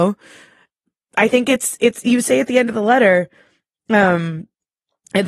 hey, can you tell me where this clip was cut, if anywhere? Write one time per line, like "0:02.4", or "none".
0:02.0

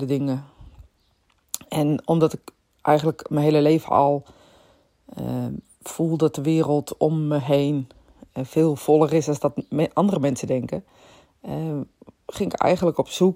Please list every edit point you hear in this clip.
none

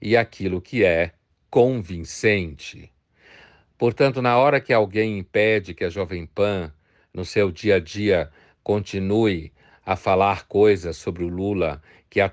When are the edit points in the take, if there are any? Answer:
none

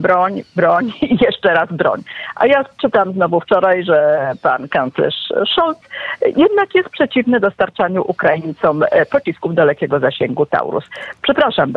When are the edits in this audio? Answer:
none

